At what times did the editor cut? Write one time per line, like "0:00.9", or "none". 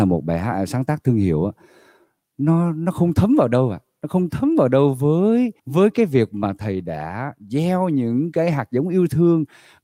0:05.6